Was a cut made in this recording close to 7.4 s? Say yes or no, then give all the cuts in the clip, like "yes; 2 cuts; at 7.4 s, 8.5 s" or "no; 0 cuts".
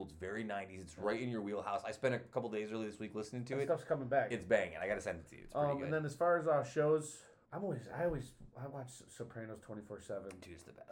yes; 1 cut; at 7.4 s